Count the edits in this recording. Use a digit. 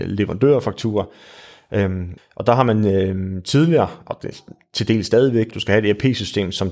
2